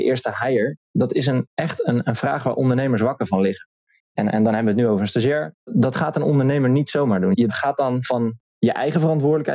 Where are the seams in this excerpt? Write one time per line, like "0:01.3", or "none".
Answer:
0:05.5